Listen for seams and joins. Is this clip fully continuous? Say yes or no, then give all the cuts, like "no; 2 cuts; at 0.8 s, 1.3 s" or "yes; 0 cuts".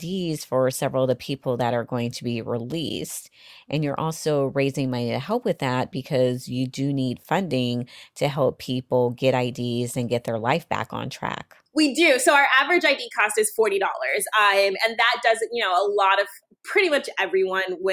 no; 2 cuts; at 11.7 s, 16.5 s